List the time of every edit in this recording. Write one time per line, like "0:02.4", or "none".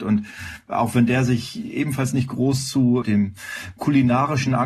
0:03.0